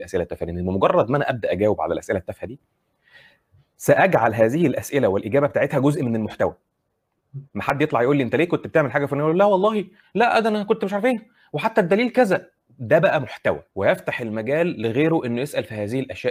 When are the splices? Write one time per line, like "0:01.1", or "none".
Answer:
0:07.5
0:13.7